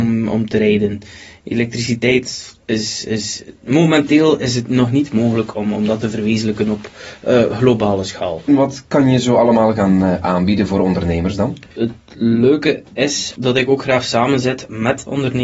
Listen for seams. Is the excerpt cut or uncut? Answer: cut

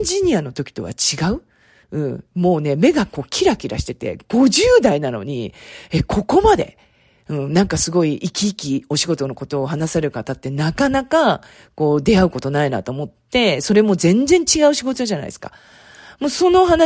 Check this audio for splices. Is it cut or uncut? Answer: uncut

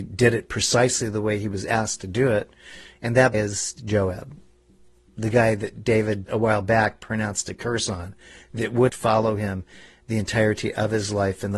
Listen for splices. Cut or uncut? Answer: cut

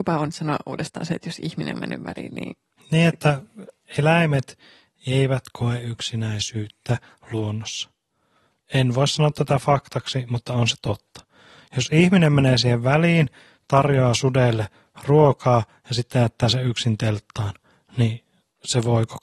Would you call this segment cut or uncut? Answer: uncut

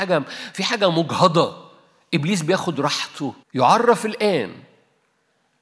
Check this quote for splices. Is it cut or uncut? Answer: cut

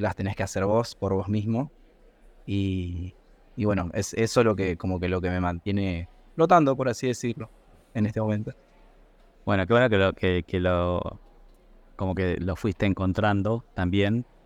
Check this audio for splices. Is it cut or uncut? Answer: uncut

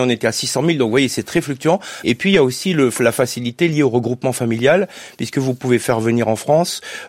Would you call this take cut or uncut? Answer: cut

